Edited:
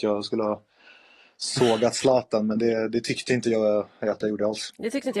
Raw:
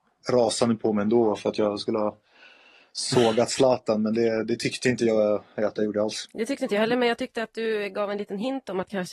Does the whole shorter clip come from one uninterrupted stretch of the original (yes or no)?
yes